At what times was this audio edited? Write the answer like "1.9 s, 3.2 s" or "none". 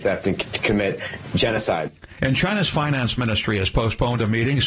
2.2 s